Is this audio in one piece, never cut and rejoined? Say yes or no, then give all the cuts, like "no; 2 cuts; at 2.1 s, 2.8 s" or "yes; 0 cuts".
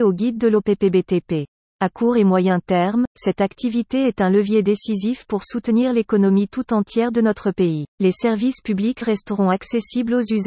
no; 2 cuts; at 1.7 s, 7.9 s